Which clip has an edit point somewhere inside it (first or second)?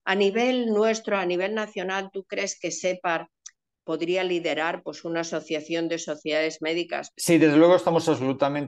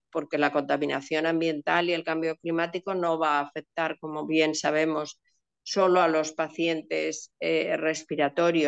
first